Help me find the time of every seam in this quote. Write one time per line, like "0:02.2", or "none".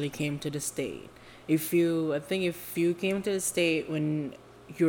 none

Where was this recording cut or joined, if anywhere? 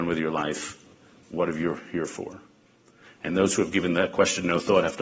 0:01.2

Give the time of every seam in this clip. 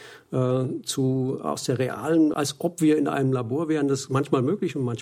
0:02.3

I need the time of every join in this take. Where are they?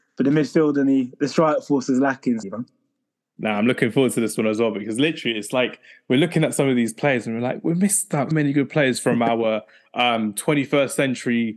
0:02.4
0:08.3

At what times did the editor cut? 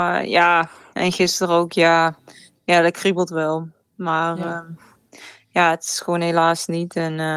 none

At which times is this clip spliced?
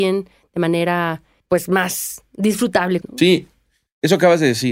0:03.0

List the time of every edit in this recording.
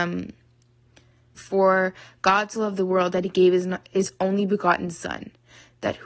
0:01.4

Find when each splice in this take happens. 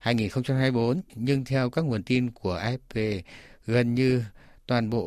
none

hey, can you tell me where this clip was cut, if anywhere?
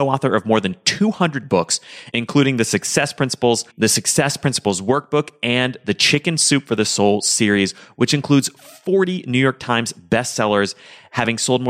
0:03.7

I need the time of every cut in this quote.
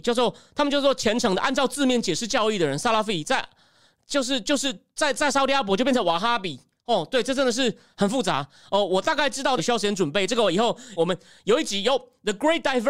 0:09.6
0:11.0

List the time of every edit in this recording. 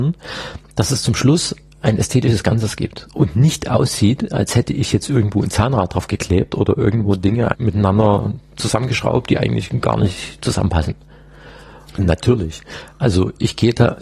0:07.5
0:12.0

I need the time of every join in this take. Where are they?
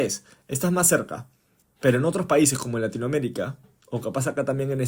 0:01.6

